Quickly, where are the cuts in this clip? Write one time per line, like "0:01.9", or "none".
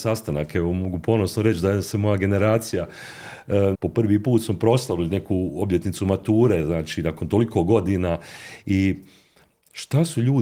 0:03.7